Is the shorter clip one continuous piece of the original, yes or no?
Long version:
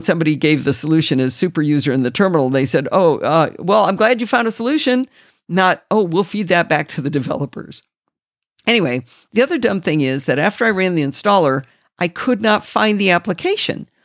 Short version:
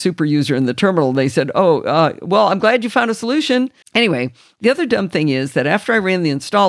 no